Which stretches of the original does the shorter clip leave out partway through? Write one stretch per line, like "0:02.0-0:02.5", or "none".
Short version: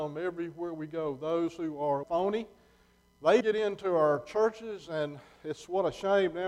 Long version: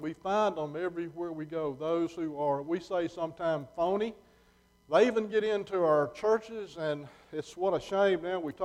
0:02.6-0:03.7
0:05.1-0:05.3